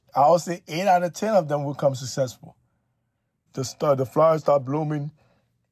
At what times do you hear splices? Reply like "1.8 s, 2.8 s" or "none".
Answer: 3.5 s